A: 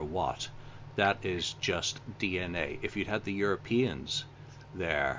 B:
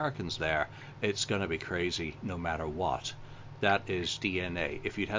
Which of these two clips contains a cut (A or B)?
B